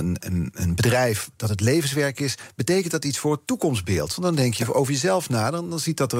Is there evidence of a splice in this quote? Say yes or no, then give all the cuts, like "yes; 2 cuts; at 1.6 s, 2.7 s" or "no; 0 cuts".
no; 0 cuts